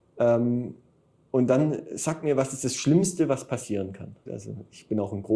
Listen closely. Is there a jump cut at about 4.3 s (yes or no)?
yes